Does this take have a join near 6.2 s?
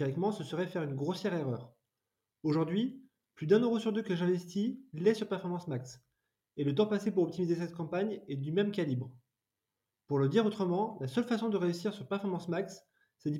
no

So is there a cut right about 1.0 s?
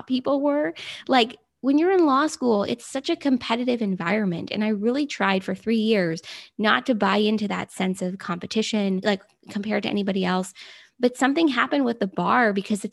no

